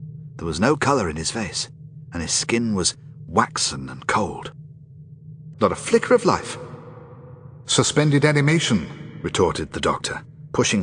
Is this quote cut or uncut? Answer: cut